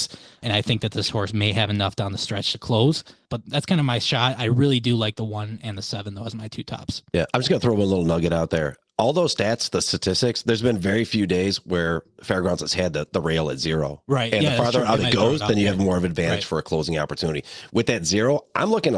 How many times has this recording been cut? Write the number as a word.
zero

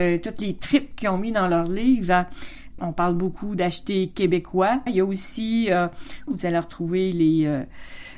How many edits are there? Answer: three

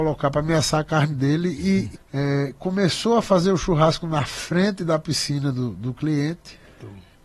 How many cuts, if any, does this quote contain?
one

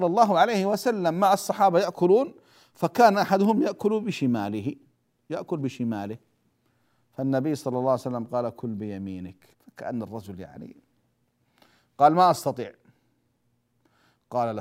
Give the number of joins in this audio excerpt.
one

